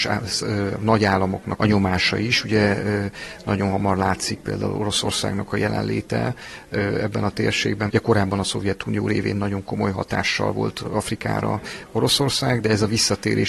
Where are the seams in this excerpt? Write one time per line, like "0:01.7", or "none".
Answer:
0:01.6
0:07.9